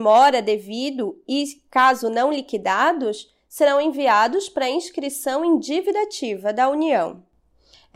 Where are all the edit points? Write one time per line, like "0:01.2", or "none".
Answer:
none